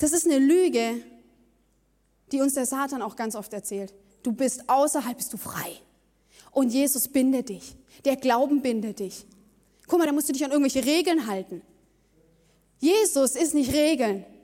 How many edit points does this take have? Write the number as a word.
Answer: one